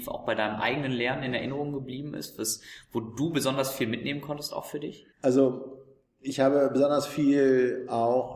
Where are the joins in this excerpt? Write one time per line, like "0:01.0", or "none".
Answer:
0:05.1